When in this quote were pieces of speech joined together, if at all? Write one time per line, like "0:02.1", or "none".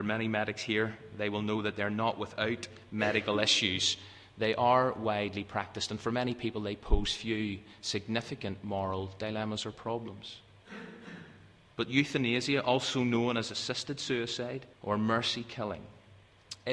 0:14.7